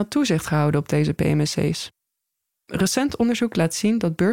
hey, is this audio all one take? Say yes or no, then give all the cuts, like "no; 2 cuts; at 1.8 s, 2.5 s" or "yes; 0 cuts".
no; 1 cut; at 2.5 s